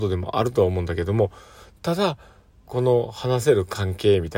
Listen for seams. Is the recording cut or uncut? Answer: cut